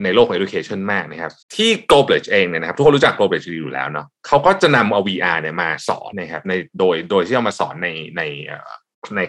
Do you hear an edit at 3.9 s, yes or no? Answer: no